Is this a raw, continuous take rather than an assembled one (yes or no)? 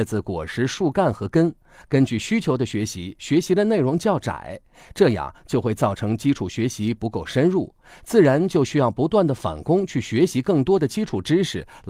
no